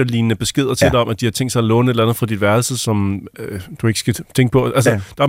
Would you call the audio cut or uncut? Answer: uncut